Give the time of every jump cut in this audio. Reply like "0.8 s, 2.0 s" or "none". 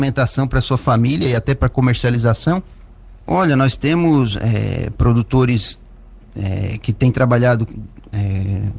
3.3 s